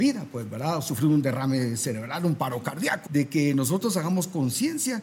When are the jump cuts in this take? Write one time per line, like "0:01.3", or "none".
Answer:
0:03.1

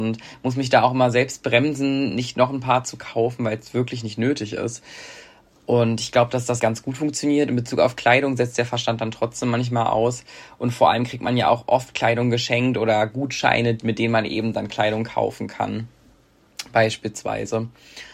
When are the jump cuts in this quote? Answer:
0:06.6

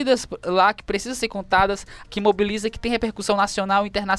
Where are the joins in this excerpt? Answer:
0:02.0

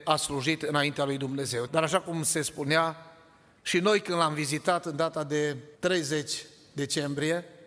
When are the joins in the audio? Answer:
0:01.7
0:05.7

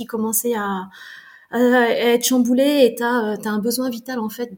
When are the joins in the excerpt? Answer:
none

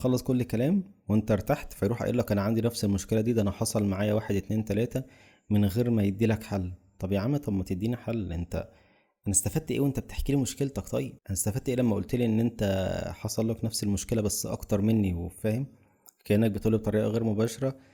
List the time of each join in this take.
0:11.2

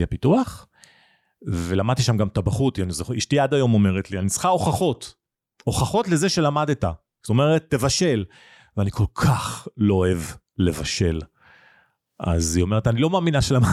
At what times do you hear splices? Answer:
none

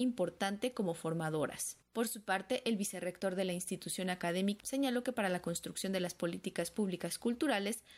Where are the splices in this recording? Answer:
0:01.8
0:04.6

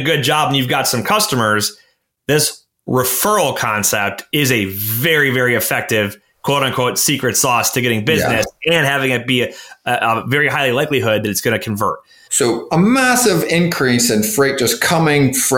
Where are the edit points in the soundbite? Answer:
0:12.3

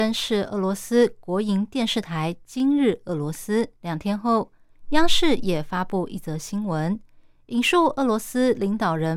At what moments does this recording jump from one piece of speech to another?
0:03.8

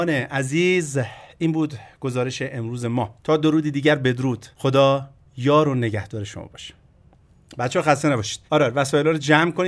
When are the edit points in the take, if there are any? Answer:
0:03.2
0:04.5
0:08.5

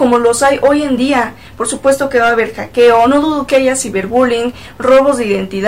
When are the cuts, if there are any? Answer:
none

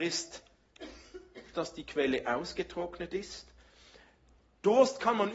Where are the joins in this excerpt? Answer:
0:01.5

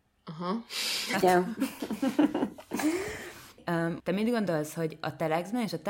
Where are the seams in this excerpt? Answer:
0:01.1
0:04.0

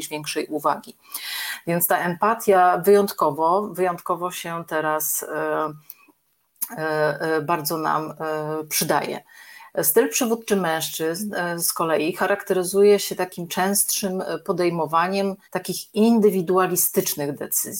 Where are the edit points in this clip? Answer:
0:15.4

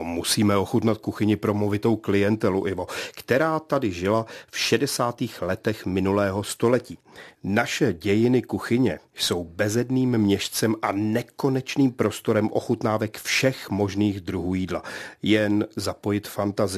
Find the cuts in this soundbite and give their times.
none

